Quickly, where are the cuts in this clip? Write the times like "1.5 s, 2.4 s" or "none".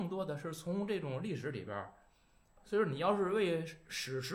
2.6 s